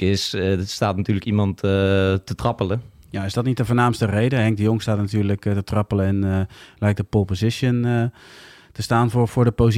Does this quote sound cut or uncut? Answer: uncut